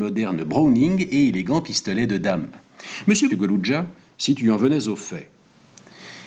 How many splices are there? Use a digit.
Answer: 1